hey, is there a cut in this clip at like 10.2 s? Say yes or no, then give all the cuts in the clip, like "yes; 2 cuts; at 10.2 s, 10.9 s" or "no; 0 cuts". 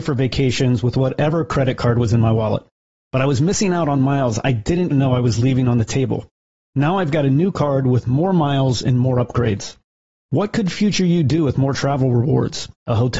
no; 1 cut; at 4.9 s